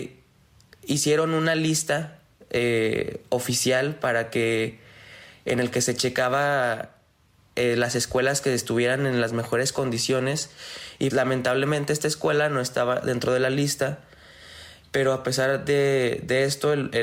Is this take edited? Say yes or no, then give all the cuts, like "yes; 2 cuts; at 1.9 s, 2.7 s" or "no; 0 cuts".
yes; 1 cut; at 11.1 s